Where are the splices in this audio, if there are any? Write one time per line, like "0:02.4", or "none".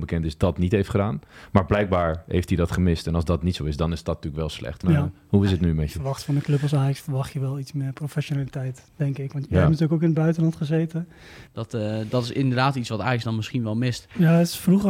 0:04.8
0:11.5